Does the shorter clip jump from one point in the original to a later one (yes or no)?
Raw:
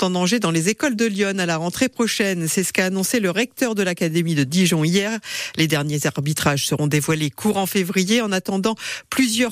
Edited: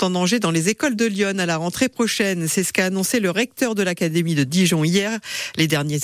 no